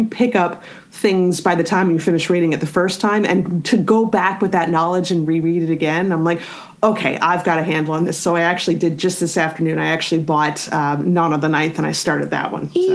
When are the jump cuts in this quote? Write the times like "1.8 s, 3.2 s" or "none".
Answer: none